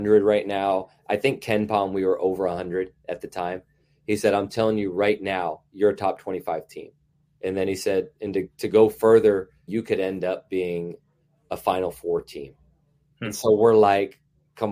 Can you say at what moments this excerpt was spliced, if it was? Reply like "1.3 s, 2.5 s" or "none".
7.3 s, 9.7 s